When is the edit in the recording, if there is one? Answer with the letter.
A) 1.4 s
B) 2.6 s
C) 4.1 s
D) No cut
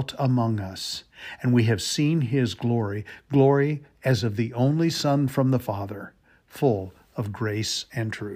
D